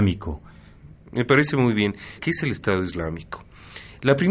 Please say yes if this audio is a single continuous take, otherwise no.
no